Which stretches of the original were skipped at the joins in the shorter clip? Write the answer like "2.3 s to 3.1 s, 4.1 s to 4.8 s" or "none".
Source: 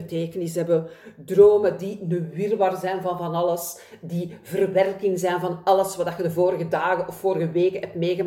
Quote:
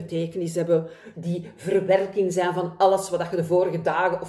1.1 s to 4.0 s